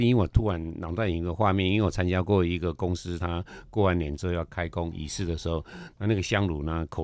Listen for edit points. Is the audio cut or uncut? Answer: uncut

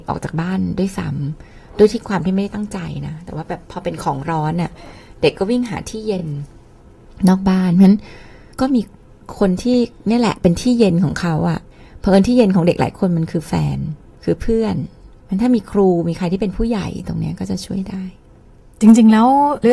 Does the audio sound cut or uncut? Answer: uncut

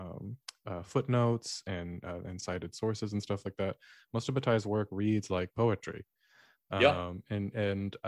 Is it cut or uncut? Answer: uncut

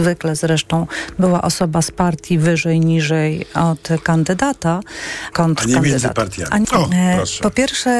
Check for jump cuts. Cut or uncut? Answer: cut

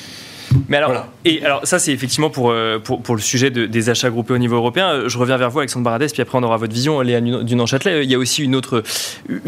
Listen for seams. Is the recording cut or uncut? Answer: uncut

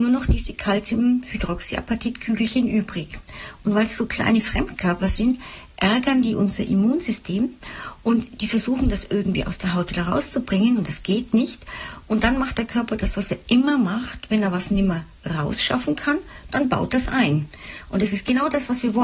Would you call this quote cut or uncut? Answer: uncut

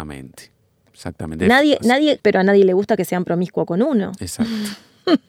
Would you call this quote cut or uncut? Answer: cut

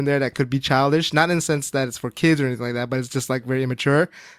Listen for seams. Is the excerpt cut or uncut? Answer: uncut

